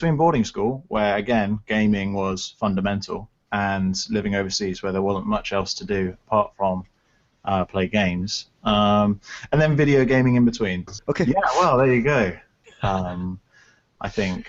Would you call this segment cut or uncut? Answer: cut